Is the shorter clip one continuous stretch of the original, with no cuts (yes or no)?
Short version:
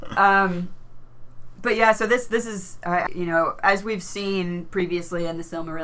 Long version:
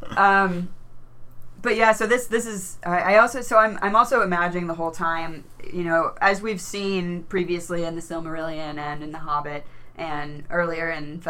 no